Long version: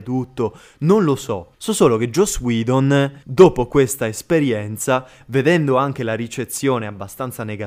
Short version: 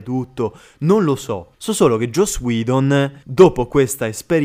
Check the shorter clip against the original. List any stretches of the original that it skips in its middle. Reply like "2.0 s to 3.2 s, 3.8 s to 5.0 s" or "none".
none